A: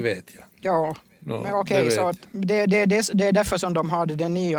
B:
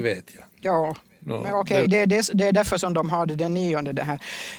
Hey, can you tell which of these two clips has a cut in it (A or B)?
B